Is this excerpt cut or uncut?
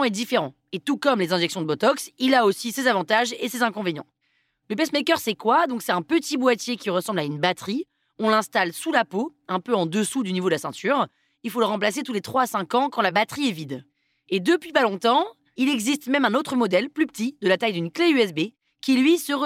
uncut